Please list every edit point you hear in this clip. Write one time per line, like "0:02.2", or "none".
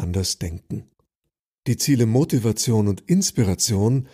none